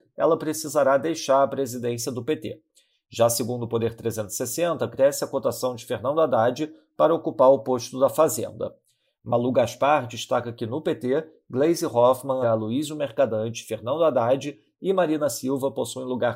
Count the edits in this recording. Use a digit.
1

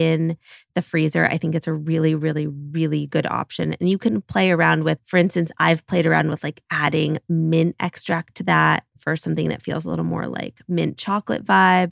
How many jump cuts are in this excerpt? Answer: 0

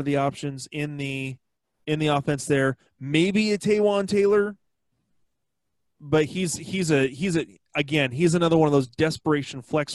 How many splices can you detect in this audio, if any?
0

